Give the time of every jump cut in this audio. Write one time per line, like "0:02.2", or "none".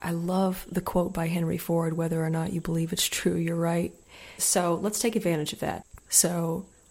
0:04.4
0:06.0